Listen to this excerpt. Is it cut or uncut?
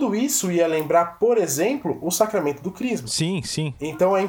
uncut